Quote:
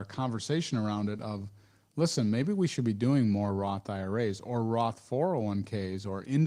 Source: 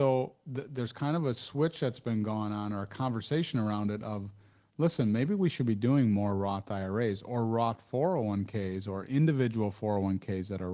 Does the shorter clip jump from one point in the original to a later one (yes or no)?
no